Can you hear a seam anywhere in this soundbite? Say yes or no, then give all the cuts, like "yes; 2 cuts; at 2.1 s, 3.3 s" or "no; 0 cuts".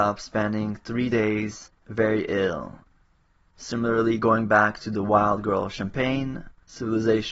no; 0 cuts